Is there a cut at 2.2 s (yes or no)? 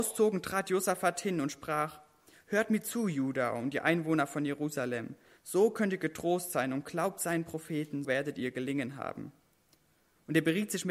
no